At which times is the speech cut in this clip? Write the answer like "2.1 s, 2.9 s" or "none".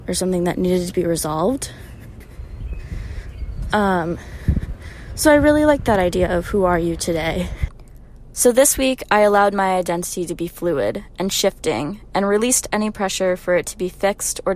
3.7 s